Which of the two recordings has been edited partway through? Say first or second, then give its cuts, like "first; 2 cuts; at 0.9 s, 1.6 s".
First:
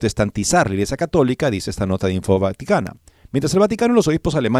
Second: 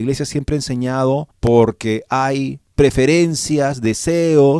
second; 2 cuts; at 1.3 s, 2.7 s